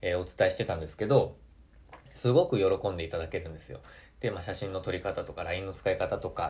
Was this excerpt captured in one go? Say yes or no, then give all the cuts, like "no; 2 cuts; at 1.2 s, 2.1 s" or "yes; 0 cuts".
yes; 0 cuts